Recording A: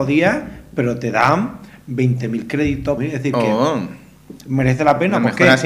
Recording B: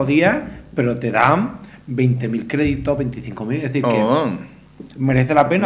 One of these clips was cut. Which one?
A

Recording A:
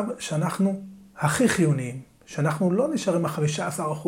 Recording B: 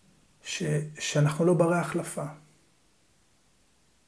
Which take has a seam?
B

